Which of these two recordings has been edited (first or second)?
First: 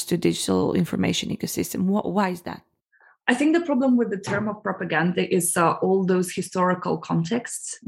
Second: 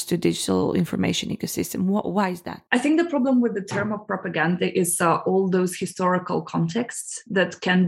second